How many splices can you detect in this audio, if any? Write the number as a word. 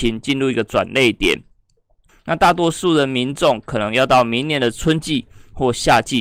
one